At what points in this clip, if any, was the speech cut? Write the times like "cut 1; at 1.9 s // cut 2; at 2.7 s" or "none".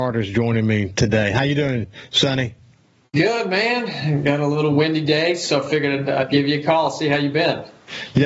cut 1; at 6.0 s